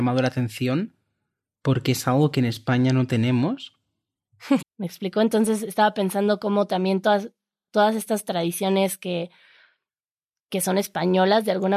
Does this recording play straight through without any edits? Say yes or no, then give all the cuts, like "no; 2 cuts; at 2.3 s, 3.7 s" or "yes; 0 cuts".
no; 1 cut; at 4.6 s